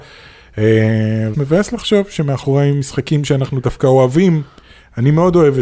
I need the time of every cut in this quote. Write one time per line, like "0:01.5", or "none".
0:01.3